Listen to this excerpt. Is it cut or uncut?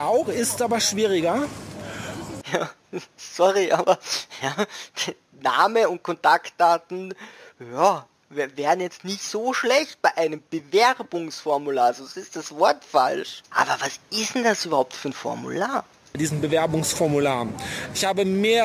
cut